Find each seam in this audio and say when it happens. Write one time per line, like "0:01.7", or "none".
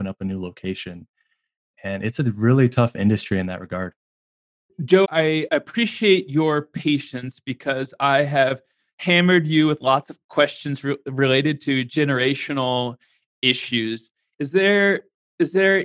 0:05.0